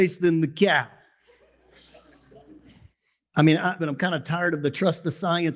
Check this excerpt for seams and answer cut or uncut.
cut